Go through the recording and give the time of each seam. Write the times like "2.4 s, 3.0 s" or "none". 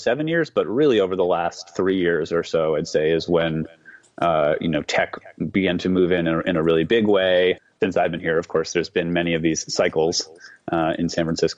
none